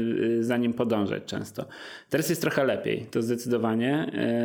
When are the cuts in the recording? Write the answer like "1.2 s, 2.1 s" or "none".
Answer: none